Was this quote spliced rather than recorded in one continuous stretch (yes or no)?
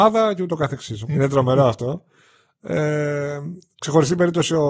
yes